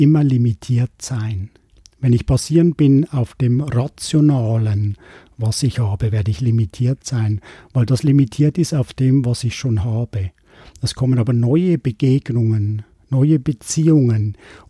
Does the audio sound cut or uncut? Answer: uncut